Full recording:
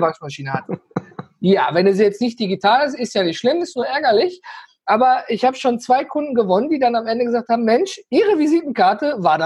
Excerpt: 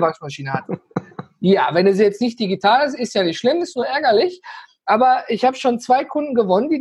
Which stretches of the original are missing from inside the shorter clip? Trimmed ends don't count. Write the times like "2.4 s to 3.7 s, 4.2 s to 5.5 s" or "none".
none